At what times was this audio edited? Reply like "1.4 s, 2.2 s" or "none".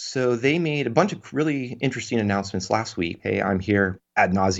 3.2 s